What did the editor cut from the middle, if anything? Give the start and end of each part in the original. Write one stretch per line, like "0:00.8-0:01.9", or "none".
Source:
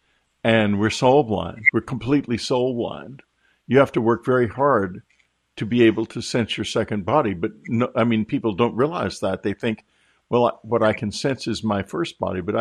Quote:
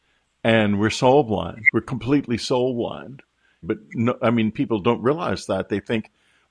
0:03.6-0:07.4

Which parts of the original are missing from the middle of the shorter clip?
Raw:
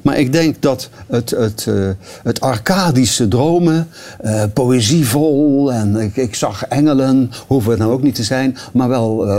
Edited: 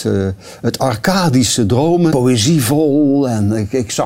0:03.7-0:04.5

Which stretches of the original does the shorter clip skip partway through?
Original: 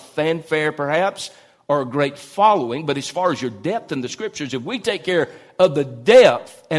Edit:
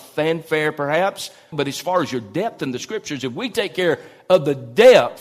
0:01.5-0:02.8

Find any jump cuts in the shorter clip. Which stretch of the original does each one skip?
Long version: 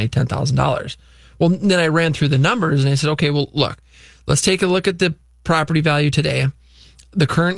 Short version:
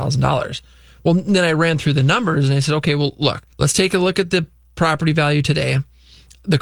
0:03.9-0:04.2

